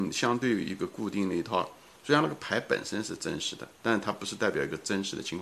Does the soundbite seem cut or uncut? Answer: cut